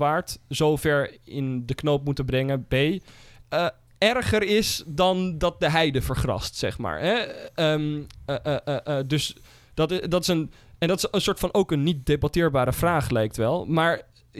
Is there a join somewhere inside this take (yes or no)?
yes